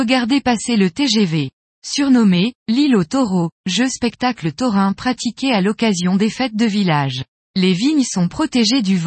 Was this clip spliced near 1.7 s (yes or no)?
no